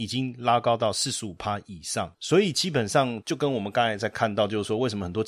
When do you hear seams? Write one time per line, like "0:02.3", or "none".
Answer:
none